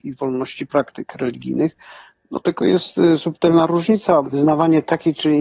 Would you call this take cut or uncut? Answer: cut